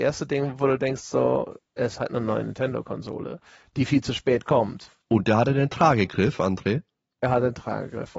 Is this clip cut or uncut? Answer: uncut